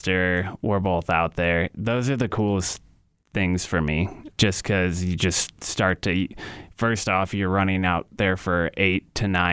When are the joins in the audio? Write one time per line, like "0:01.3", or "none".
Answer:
none